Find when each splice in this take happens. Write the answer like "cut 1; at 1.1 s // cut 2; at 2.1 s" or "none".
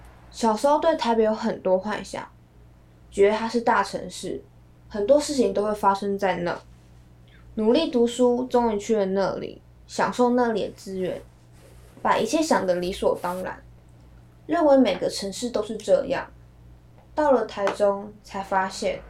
none

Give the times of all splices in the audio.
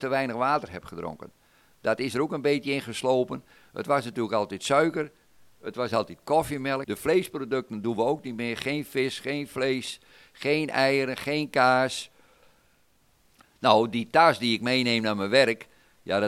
cut 1; at 6.8 s

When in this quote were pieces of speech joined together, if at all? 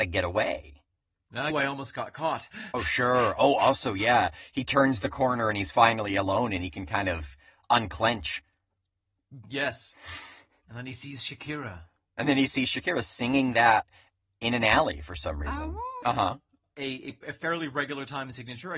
cut 1; at 1.5 s // cut 2; at 16.0 s

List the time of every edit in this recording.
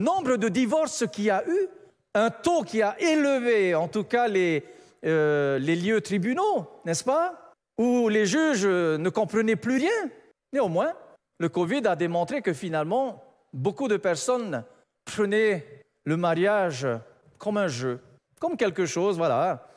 none

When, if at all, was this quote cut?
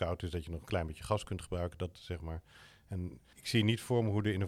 cut 1; at 2.0 s // cut 2; at 3.3 s

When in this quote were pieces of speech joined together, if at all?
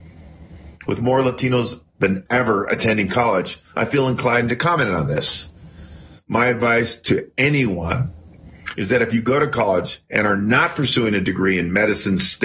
none

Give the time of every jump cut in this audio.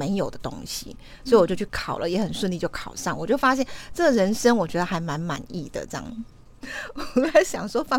cut 1; at 6.6 s

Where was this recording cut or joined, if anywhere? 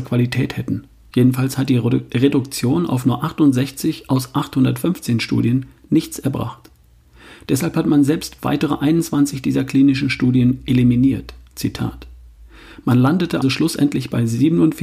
cut 1; at 1.1 s // cut 2; at 13.4 s

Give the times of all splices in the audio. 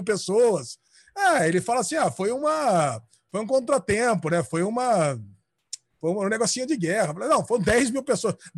none

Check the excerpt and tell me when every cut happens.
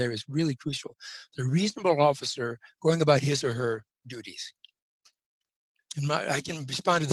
none

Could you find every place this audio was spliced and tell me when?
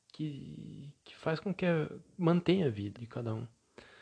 cut 1; at 3.0 s

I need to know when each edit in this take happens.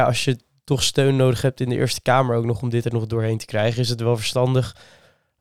none

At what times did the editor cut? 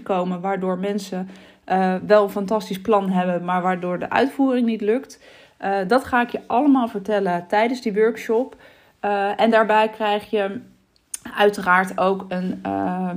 none

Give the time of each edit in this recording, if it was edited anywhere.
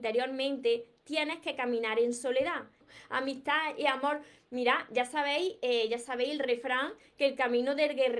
cut 1; at 2.8 s

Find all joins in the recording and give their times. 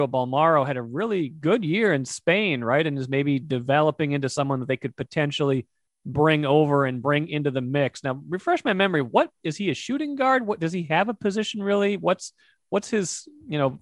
none

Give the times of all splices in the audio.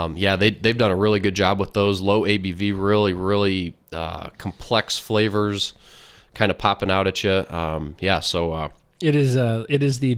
cut 1; at 3.8 s

